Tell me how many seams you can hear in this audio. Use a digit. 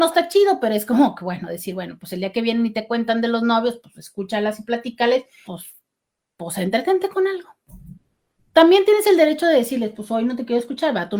1